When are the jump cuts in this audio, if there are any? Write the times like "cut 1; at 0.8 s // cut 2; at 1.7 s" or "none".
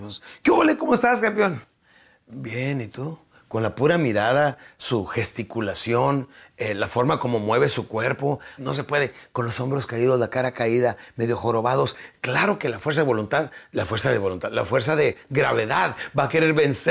cut 1; at 8.6 s